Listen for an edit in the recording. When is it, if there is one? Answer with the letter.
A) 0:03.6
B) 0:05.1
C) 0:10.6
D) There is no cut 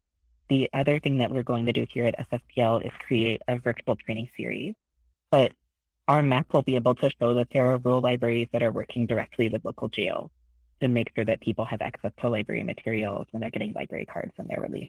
B